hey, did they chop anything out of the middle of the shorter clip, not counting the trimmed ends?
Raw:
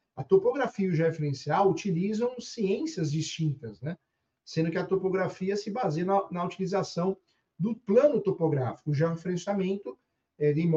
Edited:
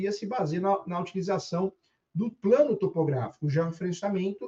no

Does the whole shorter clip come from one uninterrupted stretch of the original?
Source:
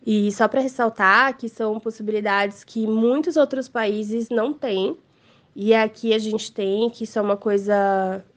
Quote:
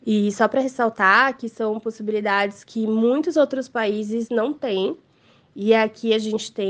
yes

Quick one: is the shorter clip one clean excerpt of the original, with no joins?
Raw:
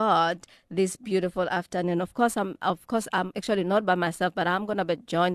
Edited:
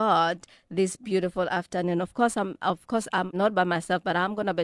no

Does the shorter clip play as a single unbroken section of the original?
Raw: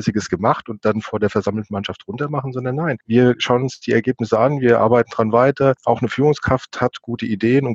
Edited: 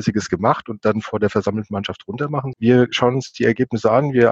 no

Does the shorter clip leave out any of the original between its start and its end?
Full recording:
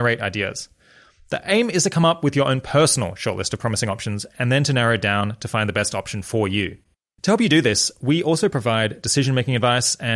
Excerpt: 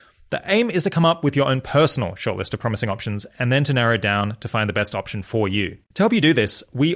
yes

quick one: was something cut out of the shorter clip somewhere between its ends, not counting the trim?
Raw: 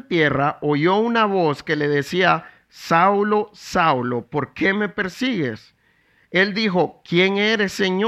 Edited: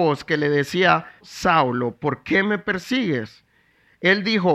yes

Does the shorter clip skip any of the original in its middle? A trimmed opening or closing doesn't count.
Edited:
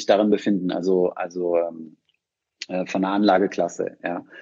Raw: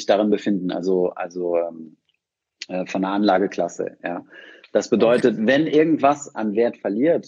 no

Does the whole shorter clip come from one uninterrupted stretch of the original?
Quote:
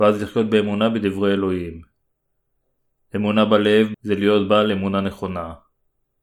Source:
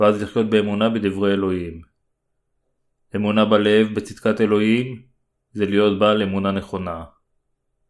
no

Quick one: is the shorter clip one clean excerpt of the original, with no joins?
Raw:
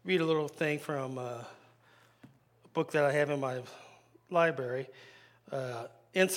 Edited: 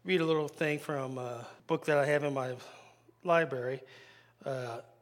no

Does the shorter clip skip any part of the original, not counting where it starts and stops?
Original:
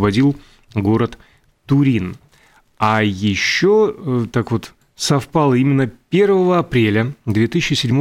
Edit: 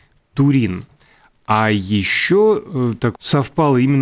yes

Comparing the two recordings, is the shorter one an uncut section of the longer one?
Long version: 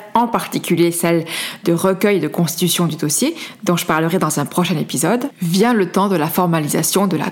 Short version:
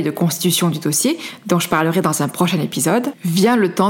yes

